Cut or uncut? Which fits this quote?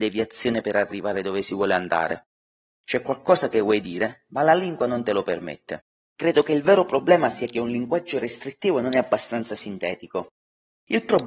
uncut